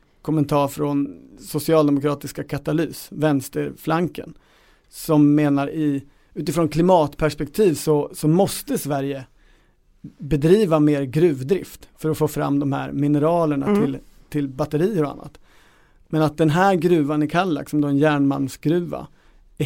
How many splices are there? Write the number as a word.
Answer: zero